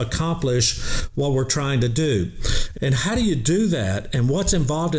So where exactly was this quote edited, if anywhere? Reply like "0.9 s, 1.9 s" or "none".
2.7 s